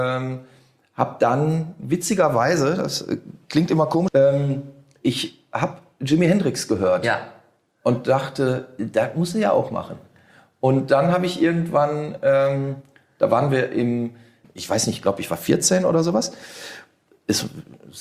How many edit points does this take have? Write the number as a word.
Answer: two